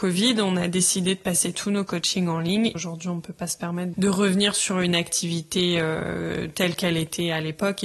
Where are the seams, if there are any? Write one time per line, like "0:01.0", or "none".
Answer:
0:03.9